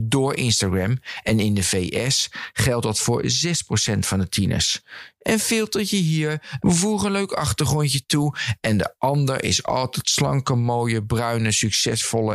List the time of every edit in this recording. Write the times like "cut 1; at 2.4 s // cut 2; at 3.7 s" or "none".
cut 1; at 6.6 s